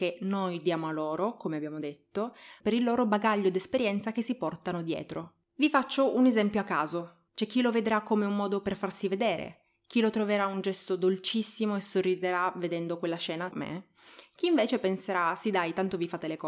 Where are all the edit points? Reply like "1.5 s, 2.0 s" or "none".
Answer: 2.6 s, 7.3 s, 13.5 s